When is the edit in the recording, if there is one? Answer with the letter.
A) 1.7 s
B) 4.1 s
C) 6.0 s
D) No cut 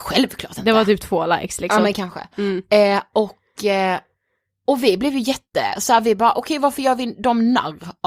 D